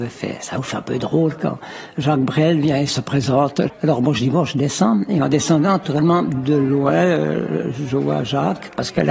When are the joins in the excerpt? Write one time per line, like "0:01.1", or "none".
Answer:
0:03.7